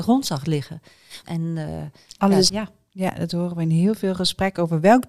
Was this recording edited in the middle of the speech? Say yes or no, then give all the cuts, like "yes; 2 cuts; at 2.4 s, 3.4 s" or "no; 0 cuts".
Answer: yes; 2 cuts; at 1.2 s, 2.5 s